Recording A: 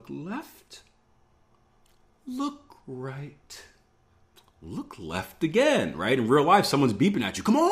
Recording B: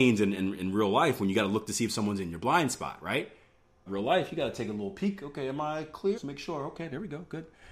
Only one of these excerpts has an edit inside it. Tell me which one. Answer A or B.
B